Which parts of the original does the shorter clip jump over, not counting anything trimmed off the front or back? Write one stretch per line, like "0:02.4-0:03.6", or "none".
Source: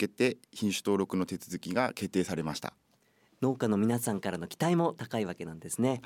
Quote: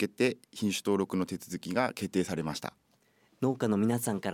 none